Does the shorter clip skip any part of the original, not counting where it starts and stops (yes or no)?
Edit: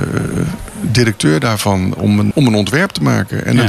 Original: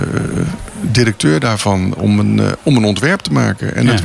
yes